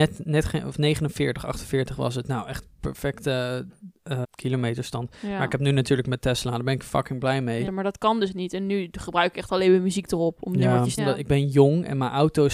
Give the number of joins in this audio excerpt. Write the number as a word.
three